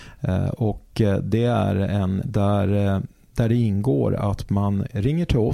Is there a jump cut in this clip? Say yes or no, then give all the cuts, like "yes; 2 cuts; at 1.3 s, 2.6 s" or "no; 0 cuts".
yes; 1 cut; at 2.2 s